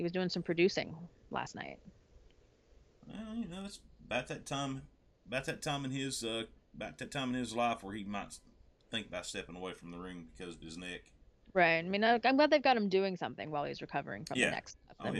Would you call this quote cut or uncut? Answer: uncut